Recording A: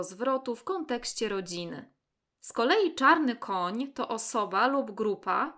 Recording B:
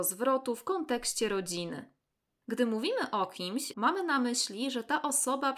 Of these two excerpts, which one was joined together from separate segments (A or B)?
B